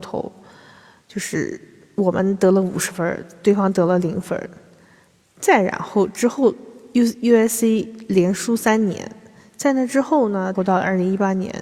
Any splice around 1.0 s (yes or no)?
no